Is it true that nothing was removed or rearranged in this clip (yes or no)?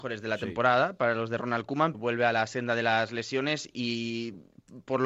no